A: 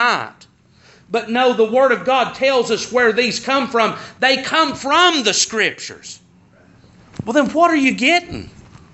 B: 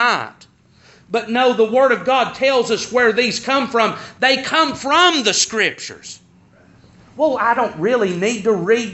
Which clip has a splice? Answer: A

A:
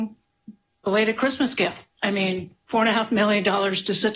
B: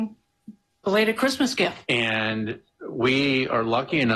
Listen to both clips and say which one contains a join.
B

